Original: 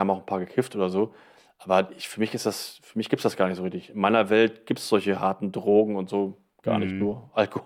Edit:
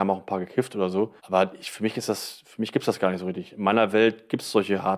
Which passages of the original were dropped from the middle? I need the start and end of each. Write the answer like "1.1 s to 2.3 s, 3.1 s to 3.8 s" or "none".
1.2 s to 1.5 s